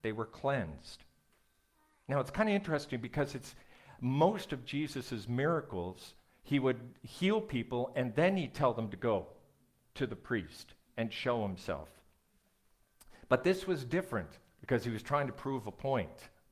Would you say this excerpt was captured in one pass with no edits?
yes; 0 cuts

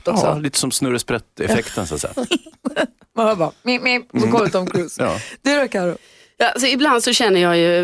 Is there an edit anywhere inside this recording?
no; 0 cuts

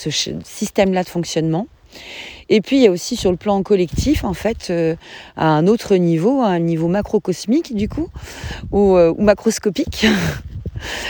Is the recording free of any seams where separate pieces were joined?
yes; 0 cuts

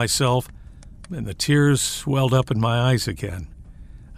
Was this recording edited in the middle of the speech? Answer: yes; 1 cut; at 1.1 s

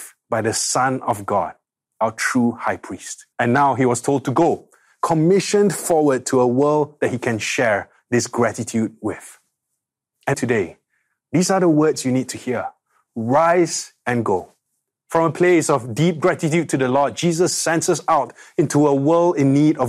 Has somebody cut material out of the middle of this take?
yes; 2 cuts; at 3.3 s, 10.3 s

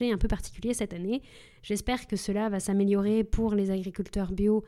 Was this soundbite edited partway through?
no; 0 cuts

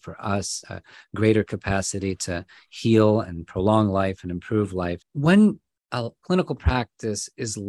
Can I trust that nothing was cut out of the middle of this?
no; 2 cuts; at 5.0 s, 6.2 s

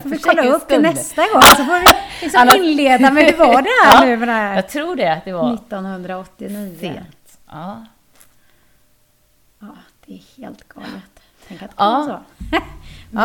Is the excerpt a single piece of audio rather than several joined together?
yes; 0 cuts

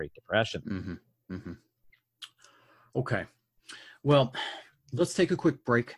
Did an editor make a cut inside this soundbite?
no; 0 cuts

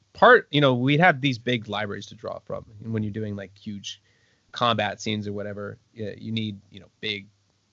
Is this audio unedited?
yes; 0 cuts

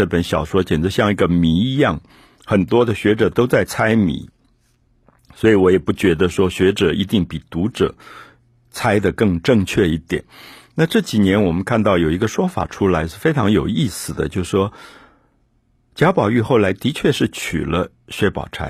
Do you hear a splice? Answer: no; 0 cuts

